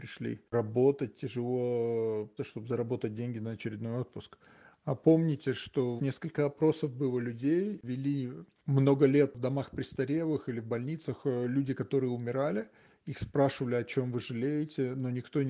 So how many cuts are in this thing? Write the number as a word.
two